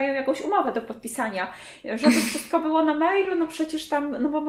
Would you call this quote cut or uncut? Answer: uncut